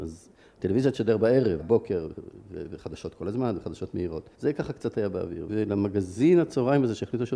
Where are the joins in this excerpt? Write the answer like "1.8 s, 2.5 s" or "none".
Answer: 1.6 s, 4.3 s, 5.5 s